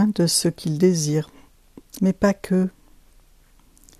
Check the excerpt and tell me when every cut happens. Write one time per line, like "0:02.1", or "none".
0:02.0